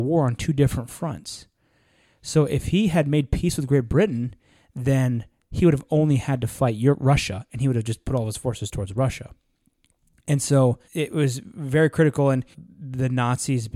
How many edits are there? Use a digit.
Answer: 2